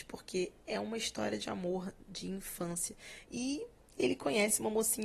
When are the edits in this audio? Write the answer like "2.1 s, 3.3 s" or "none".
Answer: 3.2 s